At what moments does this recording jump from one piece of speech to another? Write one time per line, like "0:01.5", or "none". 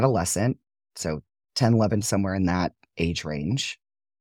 0:02.0